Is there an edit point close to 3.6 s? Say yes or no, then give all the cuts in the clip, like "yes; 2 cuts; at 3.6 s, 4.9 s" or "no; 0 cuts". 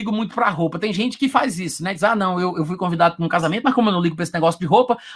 no; 0 cuts